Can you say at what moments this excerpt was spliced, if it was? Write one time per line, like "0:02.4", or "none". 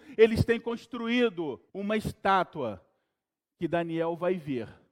0:01.7

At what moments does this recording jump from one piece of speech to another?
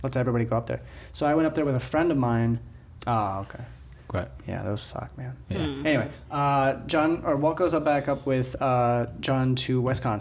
0:03.0

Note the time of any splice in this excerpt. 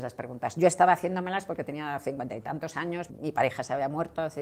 0:03.1

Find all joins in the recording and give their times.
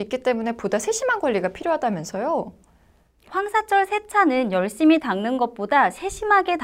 0:03.3

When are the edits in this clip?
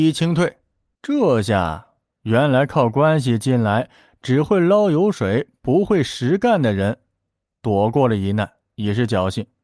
0:00.9

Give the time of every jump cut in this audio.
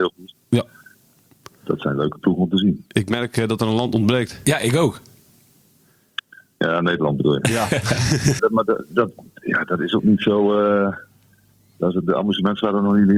0:08.4

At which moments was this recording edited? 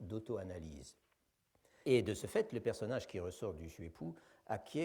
0:01.8

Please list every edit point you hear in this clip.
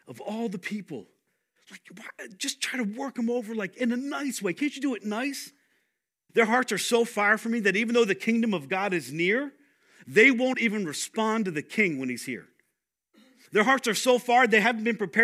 0:06.3

